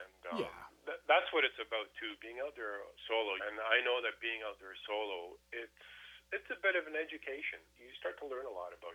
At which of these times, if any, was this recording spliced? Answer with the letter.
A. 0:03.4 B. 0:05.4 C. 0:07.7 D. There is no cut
A